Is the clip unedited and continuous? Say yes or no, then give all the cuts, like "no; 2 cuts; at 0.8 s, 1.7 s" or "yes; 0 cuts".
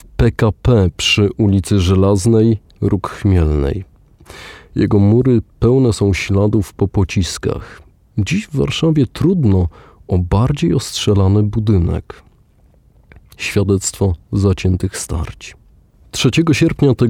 yes; 0 cuts